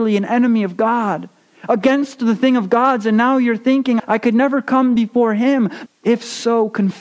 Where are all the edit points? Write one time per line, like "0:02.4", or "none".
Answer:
0:04.0
0:05.9